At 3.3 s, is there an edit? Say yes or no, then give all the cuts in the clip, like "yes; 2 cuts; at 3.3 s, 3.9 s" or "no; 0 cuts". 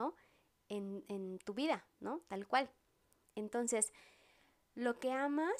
no; 0 cuts